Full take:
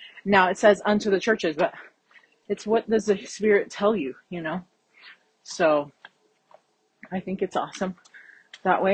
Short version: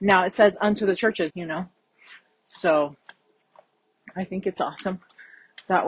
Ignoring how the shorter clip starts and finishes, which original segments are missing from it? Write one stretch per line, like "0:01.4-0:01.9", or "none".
0:01.5-0:04.3

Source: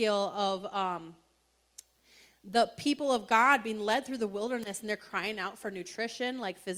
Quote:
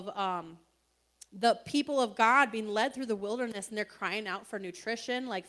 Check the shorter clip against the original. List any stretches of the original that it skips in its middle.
0:01.8-0:02.4

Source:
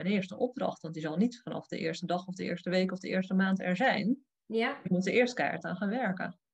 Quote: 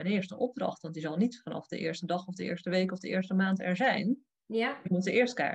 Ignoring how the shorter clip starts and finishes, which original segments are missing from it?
none

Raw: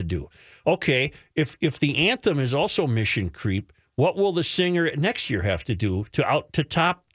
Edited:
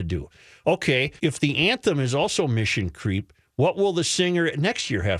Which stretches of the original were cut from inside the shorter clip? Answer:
0:01.2-0:01.6

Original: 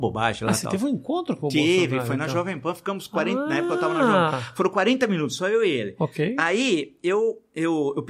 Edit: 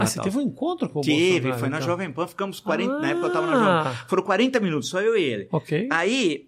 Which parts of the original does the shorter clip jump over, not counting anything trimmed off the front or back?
none

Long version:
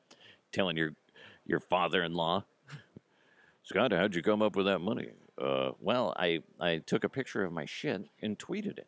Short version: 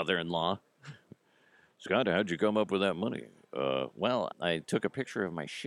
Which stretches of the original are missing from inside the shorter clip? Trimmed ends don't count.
0:06.2-0:06.5

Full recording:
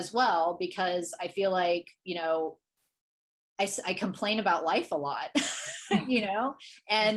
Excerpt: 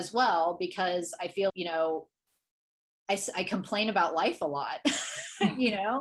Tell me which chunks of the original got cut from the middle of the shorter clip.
0:01.5-0:02.0

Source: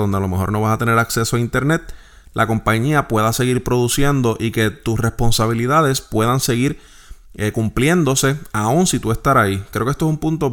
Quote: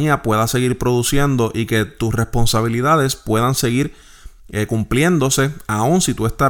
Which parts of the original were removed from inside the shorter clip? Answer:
none

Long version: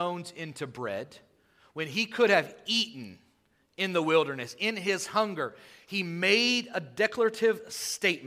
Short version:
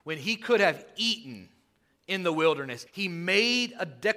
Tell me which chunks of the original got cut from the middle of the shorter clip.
0:04.6-0:05.8

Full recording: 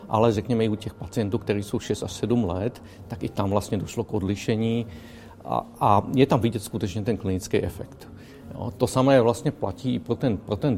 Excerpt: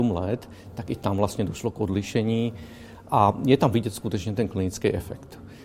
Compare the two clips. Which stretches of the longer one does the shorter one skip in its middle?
0:05.4-0:05.8

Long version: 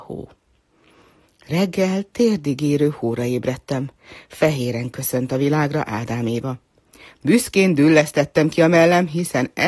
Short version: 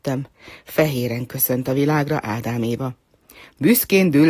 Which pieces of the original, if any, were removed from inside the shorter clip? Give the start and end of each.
none

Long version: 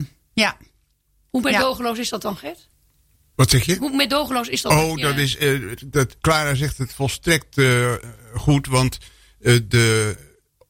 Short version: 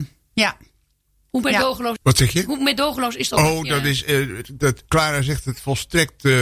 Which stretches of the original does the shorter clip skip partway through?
0:02.0-0:03.3

